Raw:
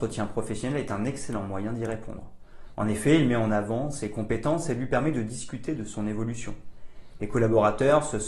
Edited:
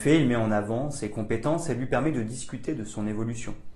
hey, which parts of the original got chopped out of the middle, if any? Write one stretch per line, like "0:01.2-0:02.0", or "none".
none

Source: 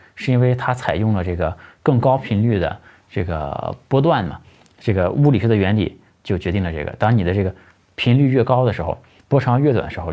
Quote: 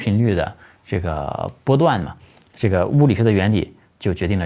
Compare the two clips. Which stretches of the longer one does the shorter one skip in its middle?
none

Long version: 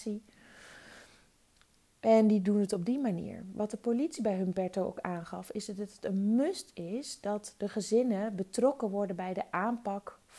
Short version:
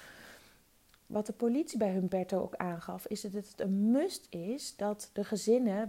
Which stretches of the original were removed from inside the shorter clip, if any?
0:01.8-0:03.5

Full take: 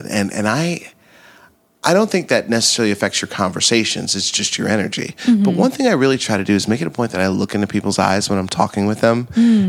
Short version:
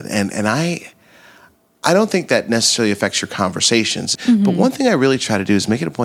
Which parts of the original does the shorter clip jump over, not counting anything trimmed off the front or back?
0:04.2-0:05.1

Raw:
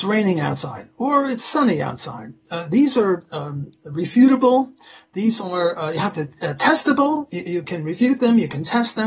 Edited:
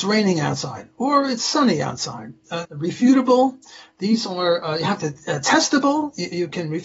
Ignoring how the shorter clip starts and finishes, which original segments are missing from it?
0:02.6-0:03.8

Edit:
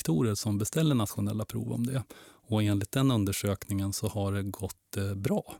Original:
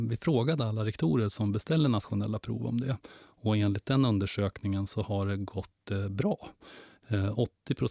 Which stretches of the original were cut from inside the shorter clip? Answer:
none

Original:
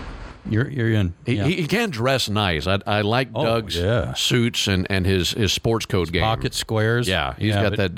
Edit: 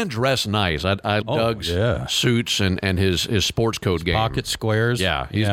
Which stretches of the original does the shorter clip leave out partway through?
0:03.0-0:03.3

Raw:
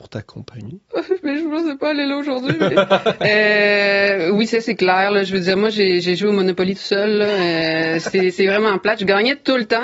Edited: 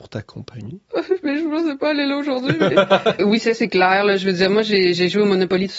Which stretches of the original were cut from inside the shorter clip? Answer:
0:03.2-0:04.3

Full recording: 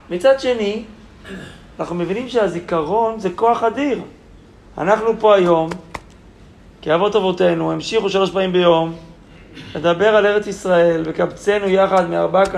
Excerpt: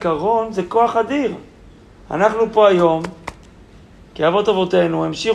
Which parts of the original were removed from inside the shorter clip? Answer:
none

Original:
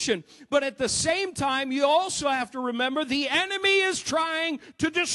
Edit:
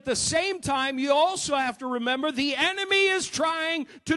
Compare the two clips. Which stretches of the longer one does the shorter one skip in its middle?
none

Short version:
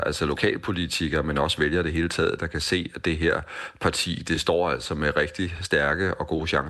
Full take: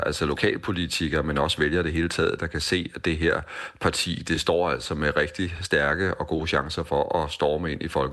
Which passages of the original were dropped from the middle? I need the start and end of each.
none

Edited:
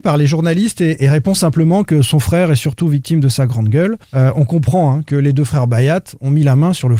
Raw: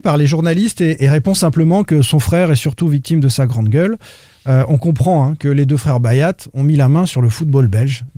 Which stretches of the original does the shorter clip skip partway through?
0:04.0-0:04.4

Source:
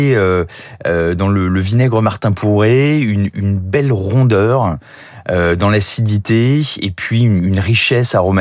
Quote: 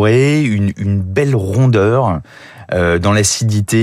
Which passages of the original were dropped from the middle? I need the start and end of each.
none

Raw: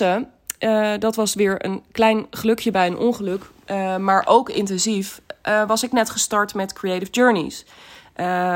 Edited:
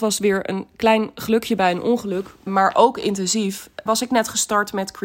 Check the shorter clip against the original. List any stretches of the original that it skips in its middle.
0:03.6-0:04.0
0:05.4-0:05.7

